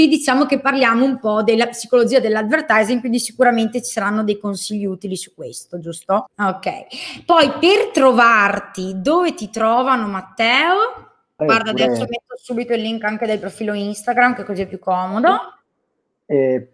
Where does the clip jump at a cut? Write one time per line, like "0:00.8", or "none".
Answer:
0:06.3
0:11.4